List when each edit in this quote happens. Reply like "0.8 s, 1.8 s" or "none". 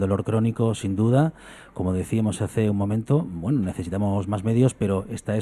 none